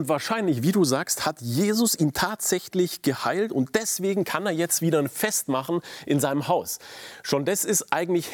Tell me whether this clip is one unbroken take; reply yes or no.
yes